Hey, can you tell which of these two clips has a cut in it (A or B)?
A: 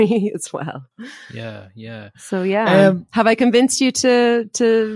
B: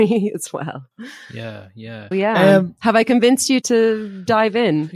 B